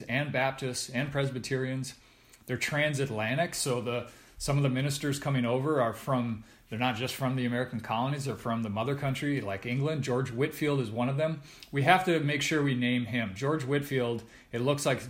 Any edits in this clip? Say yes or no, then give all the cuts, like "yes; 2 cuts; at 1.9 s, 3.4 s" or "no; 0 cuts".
no; 0 cuts